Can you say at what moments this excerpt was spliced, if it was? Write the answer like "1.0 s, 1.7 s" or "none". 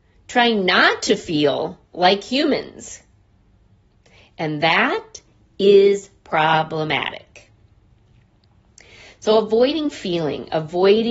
none

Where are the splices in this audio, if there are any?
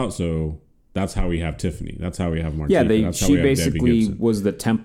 none

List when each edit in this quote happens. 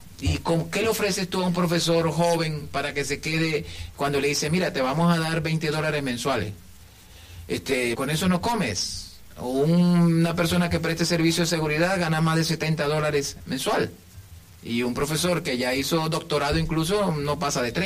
7.9 s

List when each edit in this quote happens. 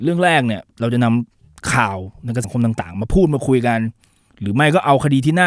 2.4 s

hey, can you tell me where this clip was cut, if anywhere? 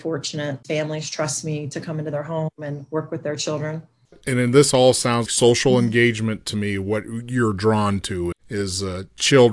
5.3 s, 8.3 s

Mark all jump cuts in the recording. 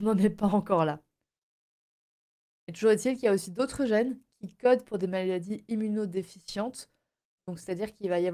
none

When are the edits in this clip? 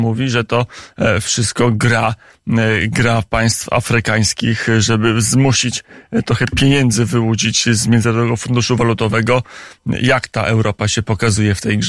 none

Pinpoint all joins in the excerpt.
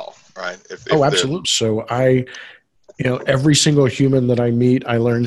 1.4 s

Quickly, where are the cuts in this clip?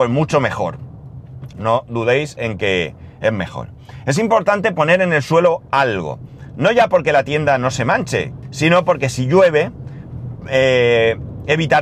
1.5 s, 8.4 s

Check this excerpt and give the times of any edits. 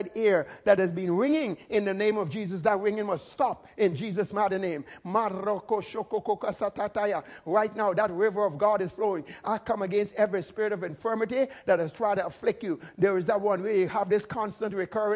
none

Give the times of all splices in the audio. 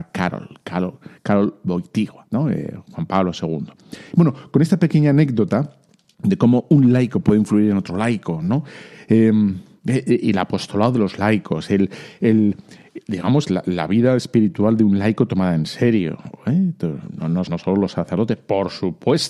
17.5 s

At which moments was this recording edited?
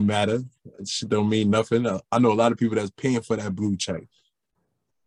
none

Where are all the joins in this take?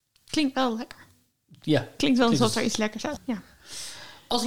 3.2 s

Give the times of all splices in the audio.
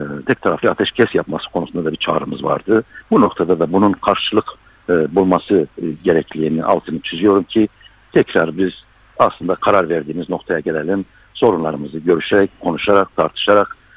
3.0 s

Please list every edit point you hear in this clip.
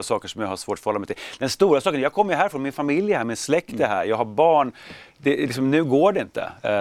none

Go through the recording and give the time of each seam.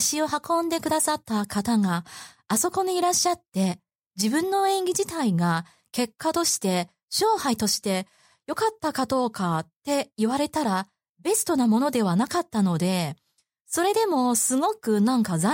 none

